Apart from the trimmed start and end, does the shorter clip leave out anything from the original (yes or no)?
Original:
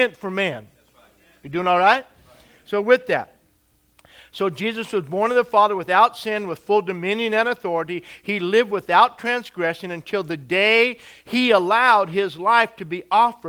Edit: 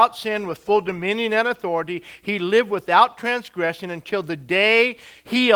no